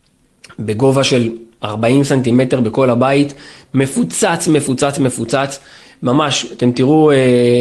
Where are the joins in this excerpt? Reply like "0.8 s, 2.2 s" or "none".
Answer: none